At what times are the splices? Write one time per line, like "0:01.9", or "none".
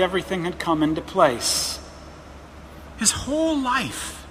0:02.9